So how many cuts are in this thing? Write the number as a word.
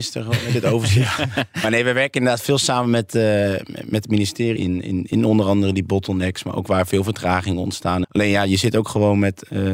two